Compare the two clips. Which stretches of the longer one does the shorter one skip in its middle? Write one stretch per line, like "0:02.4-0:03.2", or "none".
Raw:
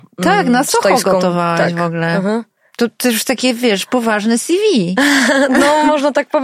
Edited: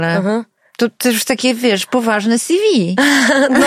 none